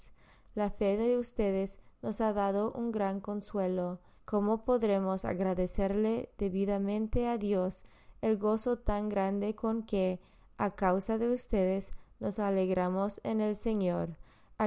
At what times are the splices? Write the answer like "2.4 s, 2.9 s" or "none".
4.2 s